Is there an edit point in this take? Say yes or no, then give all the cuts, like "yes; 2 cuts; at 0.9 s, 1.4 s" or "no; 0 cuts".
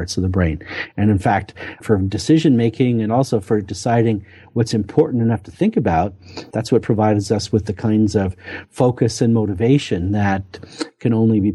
yes; 2 cuts; at 1.8 s, 6.5 s